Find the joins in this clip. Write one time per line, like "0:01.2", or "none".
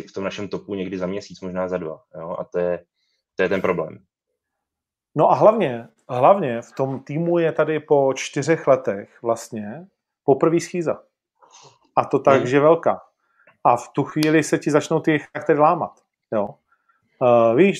none